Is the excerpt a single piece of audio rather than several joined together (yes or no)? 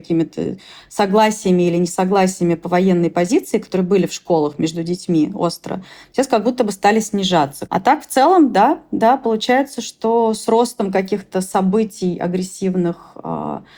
yes